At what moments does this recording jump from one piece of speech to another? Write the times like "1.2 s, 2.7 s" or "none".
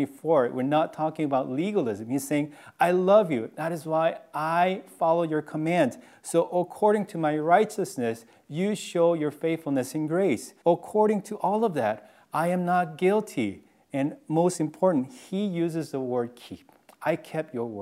10.6 s